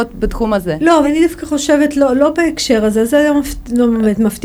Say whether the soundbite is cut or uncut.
cut